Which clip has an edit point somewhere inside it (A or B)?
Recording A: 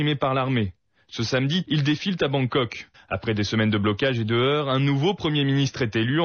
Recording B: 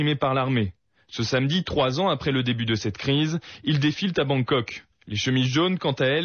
A